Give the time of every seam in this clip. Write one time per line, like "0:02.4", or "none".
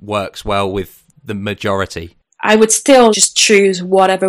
0:03.1